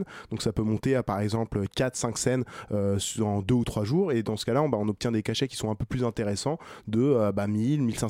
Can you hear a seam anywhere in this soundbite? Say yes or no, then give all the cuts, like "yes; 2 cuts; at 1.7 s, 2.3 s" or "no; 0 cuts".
no; 0 cuts